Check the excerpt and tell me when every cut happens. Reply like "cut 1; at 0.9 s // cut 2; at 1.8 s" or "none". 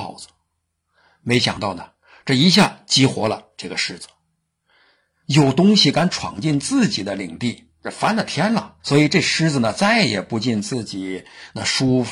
cut 1; at 8.8 s